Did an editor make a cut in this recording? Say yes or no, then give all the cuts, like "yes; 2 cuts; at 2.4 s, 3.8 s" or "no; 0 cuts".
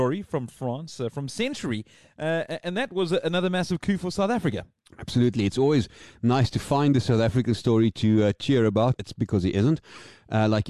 yes; 1 cut; at 9.0 s